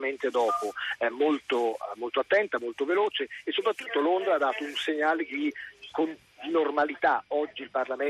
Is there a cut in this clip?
no; 0 cuts

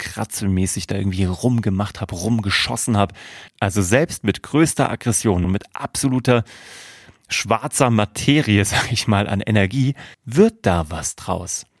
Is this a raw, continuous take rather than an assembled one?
no; 3 cuts; at 3.5 s, 5.4 s, 10.1 s

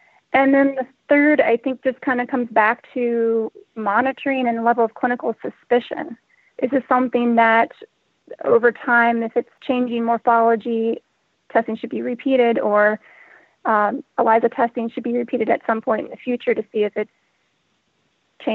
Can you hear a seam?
no; 0 cuts

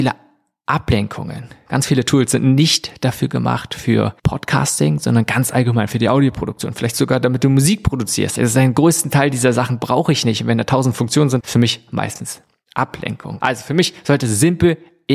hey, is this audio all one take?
no; 3 cuts; at 8.4 s, 11.4 s, 13.4 s

